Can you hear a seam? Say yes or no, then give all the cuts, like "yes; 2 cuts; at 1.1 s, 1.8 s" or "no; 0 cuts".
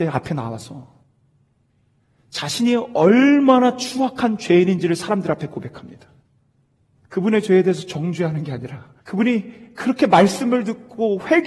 yes; 2 cuts; at 7.0 s, 9.0 s